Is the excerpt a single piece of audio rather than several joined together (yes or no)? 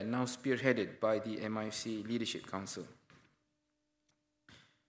yes